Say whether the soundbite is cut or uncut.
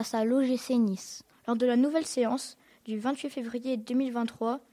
cut